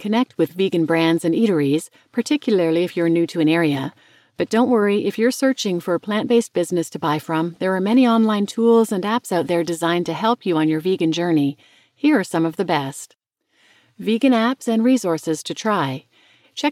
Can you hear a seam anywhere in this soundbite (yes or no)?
no